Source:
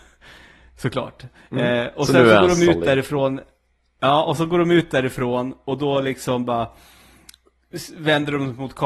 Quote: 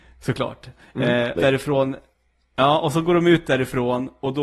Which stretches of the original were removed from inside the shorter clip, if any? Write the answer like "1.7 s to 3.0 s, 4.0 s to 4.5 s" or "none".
1.9 s to 2.8 s